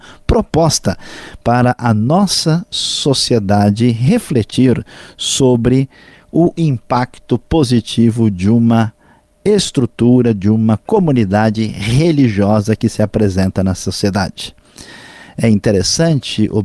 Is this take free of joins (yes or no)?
yes